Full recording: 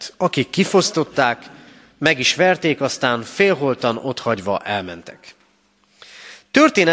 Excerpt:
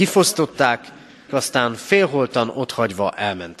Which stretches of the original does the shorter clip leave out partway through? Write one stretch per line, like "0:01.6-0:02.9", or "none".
0:01.9-0:02.8